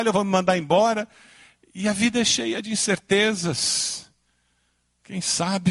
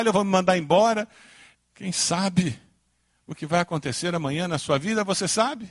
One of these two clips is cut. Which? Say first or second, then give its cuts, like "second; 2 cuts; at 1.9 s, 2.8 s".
second; 1 cut; at 1.5 s